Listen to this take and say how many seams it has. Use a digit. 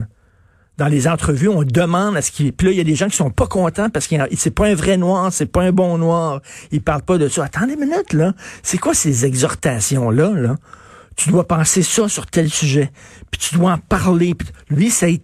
0